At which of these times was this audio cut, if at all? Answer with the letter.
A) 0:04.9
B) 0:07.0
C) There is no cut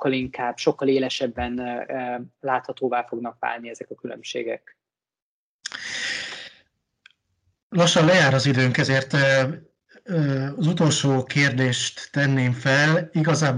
C